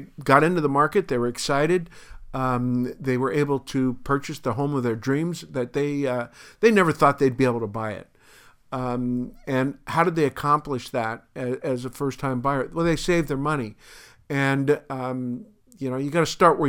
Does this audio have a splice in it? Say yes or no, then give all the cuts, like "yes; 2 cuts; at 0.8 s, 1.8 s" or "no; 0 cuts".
no; 0 cuts